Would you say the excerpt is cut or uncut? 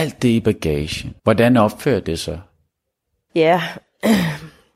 cut